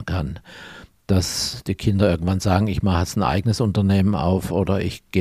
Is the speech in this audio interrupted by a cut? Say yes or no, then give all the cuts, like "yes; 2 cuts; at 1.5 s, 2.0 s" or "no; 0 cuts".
no; 0 cuts